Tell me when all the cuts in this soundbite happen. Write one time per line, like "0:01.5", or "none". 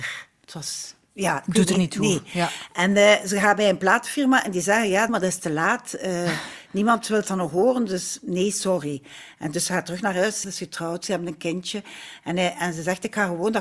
0:05.1
0:10.4